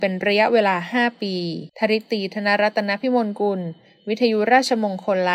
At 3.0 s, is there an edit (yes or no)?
no